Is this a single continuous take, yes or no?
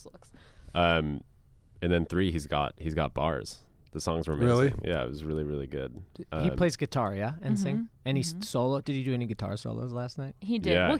yes